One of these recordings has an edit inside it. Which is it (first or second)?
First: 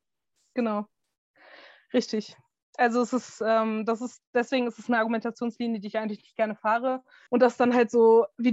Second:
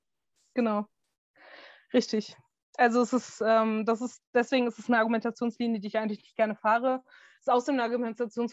first